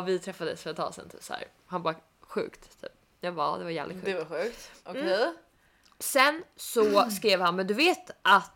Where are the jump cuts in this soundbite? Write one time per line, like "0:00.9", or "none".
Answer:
none